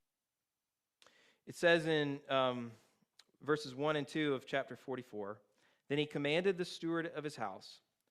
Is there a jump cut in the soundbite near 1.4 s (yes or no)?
no